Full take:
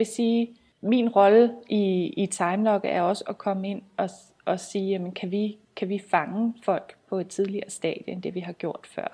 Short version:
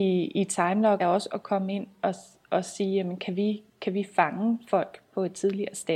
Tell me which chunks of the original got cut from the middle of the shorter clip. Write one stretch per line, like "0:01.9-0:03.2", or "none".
0:02.8-0:02.9